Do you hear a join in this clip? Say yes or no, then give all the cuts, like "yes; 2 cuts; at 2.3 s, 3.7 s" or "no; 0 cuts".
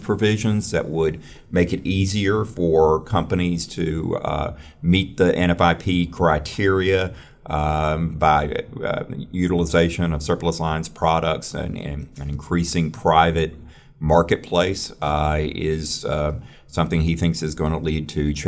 no; 0 cuts